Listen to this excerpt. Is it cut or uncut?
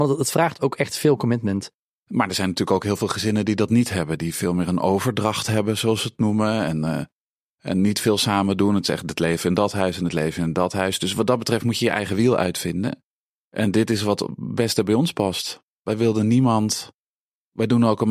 cut